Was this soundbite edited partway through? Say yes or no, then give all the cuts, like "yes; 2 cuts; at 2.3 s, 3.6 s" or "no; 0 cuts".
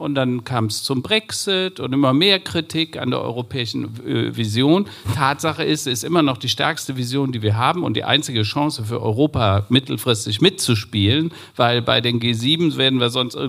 no; 0 cuts